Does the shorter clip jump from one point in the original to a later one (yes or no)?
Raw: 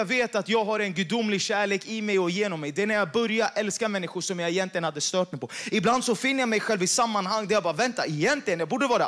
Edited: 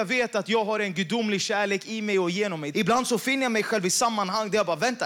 yes